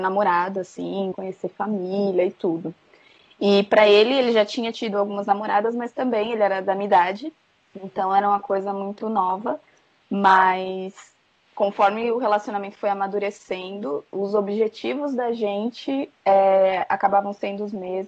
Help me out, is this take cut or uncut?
cut